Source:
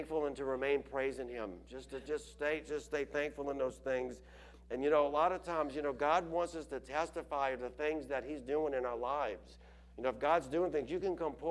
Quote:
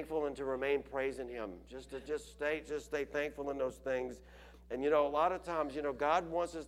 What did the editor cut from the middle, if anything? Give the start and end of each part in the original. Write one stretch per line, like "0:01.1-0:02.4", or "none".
none